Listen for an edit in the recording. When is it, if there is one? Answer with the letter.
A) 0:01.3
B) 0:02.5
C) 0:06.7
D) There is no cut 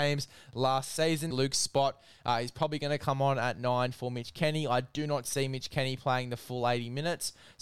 A